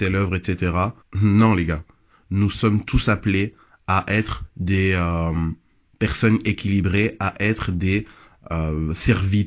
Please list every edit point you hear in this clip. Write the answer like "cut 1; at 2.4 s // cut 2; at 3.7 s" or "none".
cut 1; at 1.0 s